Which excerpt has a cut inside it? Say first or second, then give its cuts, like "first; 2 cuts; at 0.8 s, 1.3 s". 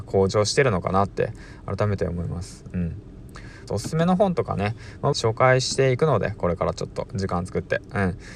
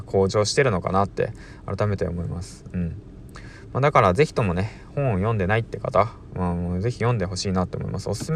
first; 2 cuts; at 3.7 s, 5.1 s